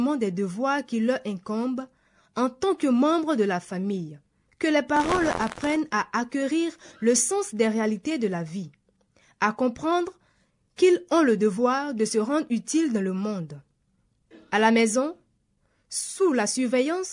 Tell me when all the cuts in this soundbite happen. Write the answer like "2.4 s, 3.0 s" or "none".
4.5 s